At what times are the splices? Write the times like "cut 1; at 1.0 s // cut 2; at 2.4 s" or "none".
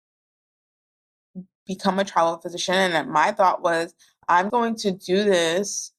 cut 1; at 4.5 s